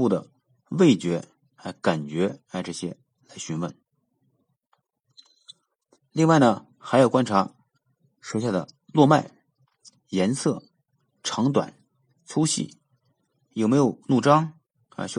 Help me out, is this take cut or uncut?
uncut